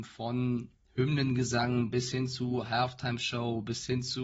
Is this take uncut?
yes; 0 cuts

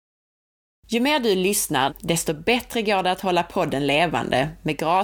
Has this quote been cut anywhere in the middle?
yes; 1 cut; at 1.9 s

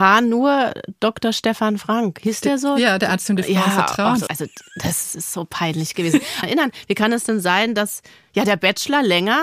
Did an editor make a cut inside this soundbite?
yes; 2 cuts; at 4.3 s, 6.4 s

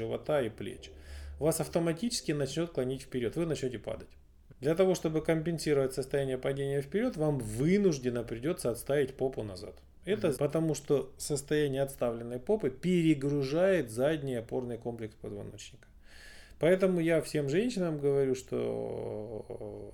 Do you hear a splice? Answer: yes; 2 cuts; at 4.5 s, 10.4 s

